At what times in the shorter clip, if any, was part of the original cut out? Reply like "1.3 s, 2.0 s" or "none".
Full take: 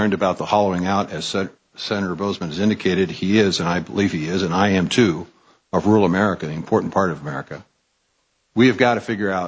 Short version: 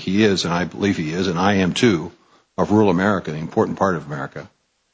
none